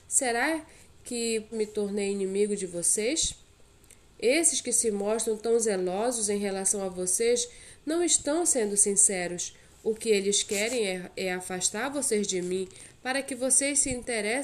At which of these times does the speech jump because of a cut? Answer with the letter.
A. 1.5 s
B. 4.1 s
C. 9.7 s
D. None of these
A